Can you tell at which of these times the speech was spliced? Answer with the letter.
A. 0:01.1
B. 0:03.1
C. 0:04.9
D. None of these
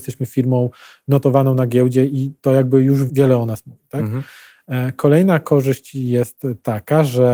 B